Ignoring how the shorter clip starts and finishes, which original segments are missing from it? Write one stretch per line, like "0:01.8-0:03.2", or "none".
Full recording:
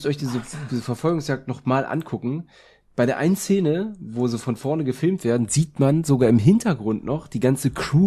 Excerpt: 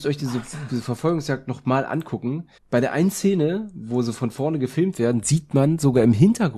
0:02.6-0:02.8